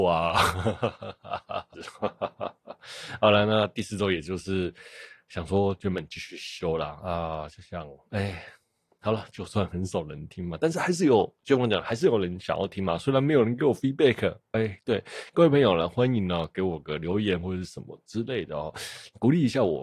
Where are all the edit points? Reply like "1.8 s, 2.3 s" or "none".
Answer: 1.7 s